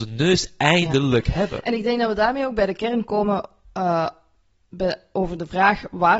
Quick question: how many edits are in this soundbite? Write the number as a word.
zero